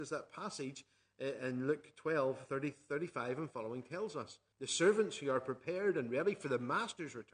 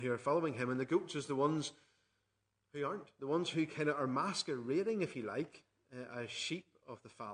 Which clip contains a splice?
first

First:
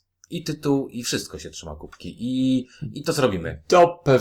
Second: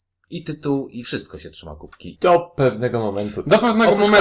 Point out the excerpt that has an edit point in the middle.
second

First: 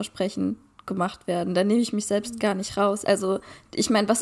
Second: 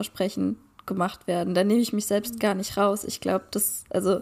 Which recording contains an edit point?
first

